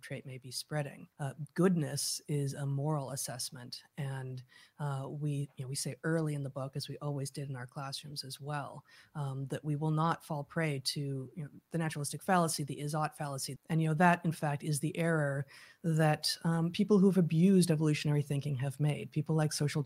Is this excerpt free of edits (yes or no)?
no